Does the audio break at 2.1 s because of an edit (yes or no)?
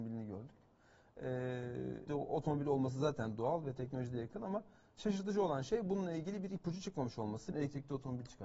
yes